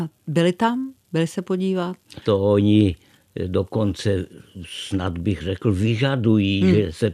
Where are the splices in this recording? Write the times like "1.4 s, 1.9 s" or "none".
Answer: 2.2 s

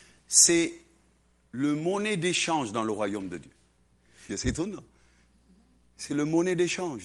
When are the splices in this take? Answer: 4.3 s

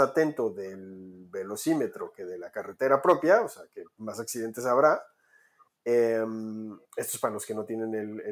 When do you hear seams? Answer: none

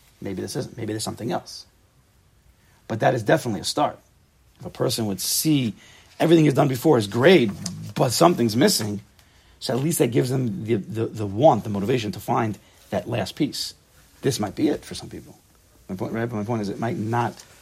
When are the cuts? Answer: none

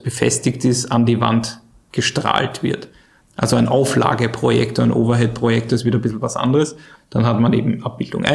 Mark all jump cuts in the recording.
3.2 s, 7.0 s

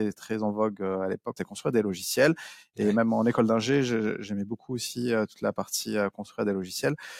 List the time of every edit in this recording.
1.4 s

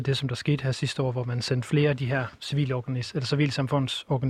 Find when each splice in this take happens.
none

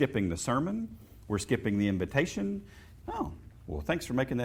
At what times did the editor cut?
3.0 s

